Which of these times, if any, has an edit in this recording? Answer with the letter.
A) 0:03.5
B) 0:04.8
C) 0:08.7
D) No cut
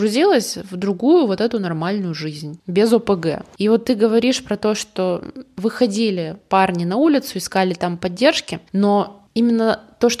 C